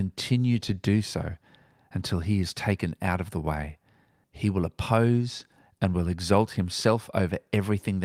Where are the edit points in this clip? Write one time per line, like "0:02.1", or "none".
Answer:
0:04.2

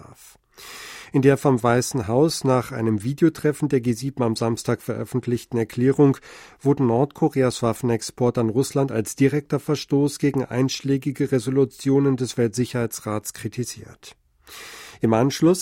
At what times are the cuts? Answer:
none

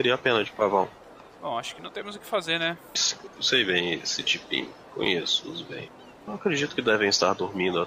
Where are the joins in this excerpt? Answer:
0:03.0
0:06.3

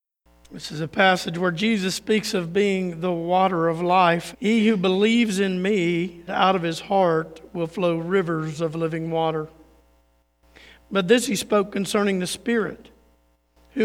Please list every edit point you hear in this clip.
0:04.3
0:06.3

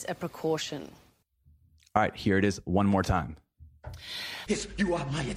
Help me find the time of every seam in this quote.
0:04.5

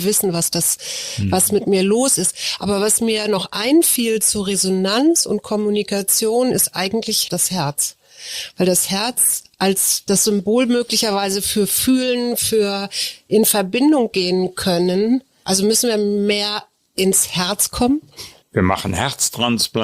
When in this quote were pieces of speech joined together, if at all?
0:18.4

